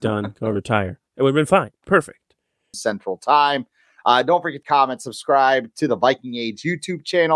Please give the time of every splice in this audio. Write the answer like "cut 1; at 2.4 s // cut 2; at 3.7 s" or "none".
cut 1; at 2.7 s // cut 2; at 4.6 s